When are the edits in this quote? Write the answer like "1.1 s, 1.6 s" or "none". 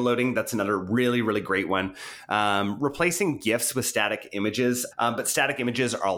4.9 s